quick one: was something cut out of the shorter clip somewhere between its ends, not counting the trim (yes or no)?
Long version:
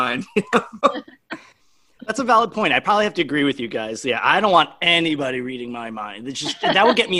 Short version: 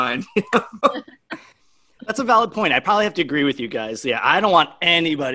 no